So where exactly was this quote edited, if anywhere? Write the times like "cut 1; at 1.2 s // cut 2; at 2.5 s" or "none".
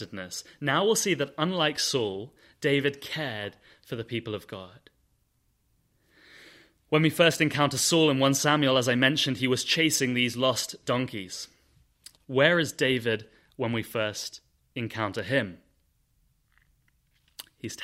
cut 1; at 12.1 s